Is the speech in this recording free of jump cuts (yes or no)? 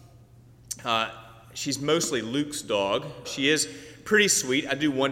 no